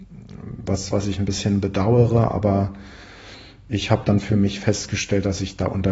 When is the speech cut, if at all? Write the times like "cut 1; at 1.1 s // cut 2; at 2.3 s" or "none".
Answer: cut 1; at 0.9 s